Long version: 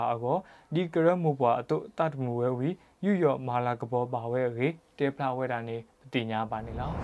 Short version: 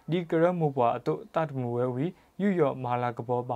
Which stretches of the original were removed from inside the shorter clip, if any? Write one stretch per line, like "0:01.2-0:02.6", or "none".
none